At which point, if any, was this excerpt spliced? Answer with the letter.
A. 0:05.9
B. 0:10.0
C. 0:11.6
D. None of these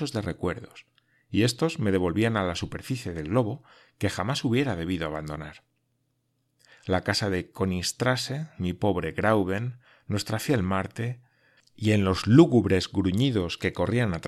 C